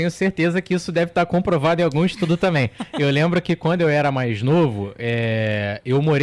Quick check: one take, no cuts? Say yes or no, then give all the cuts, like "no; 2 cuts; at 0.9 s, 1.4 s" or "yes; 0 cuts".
yes; 0 cuts